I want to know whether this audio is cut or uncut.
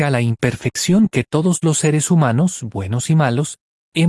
uncut